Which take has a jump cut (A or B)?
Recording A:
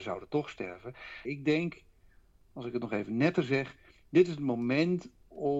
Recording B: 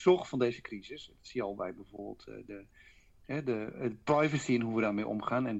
A